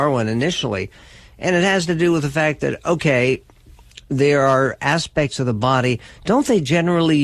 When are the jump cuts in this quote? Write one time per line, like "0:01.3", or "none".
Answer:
none